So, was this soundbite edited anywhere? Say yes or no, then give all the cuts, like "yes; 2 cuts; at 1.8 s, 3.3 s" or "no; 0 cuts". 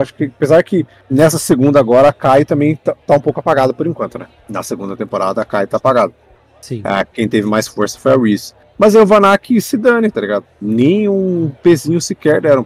no; 0 cuts